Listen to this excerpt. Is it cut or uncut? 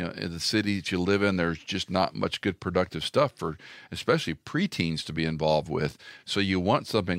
uncut